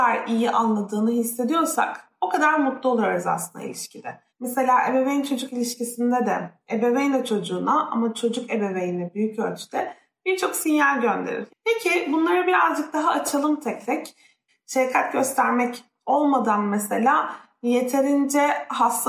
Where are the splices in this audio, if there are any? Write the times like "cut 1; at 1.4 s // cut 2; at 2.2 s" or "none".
cut 1; at 4.3 s // cut 2; at 11.5 s // cut 3; at 14.5 s